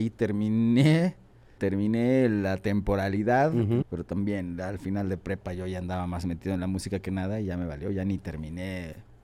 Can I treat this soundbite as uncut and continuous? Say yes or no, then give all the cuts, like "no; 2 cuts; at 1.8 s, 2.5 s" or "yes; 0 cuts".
no; 2 cuts; at 1.6 s, 3.8 s